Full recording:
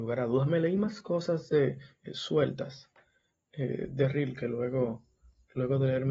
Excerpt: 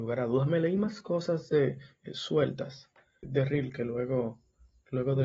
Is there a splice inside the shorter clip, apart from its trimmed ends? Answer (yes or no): yes